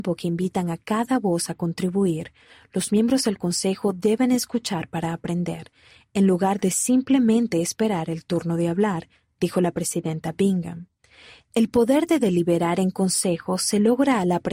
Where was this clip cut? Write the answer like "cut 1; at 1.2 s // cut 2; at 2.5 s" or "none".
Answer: none